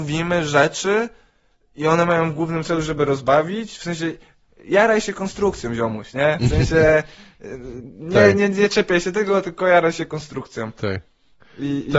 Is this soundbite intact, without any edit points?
yes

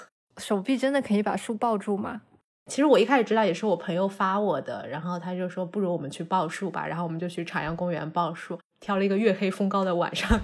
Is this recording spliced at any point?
yes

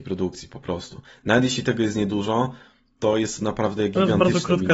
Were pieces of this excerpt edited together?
no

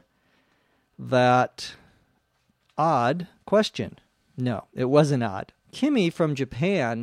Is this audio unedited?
no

